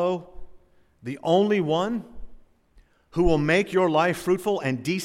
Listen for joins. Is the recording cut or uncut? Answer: uncut